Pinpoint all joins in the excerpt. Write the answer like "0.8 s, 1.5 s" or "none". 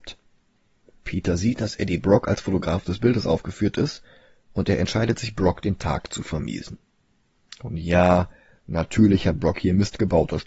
none